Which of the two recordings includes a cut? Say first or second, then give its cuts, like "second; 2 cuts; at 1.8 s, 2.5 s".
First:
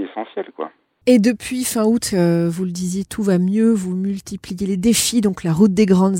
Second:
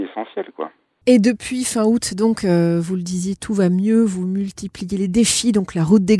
first; 1 cut; at 2.1 s